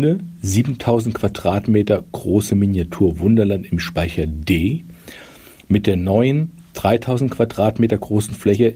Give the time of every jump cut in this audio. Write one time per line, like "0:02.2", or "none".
none